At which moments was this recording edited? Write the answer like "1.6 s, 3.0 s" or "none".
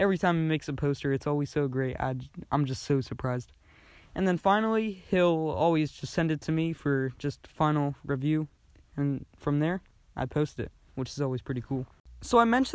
none